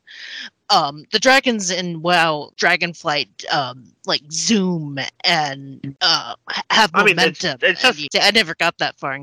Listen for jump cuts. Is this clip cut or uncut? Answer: cut